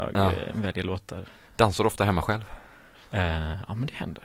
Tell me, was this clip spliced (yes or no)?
no